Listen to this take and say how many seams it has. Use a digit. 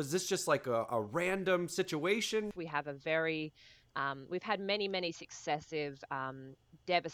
1